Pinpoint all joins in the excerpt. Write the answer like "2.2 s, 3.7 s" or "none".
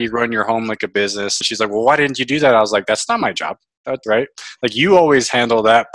1.4 s, 4.0 s